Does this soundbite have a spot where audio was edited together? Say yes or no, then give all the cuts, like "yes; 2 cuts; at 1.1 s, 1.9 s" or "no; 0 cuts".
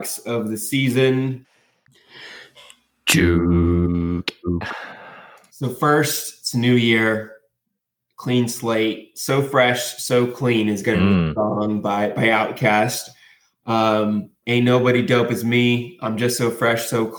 yes; 1 cut; at 14.4 s